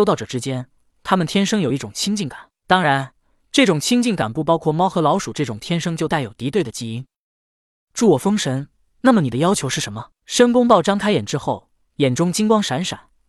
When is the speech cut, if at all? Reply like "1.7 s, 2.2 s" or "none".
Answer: none